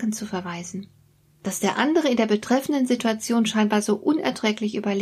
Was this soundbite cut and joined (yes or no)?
no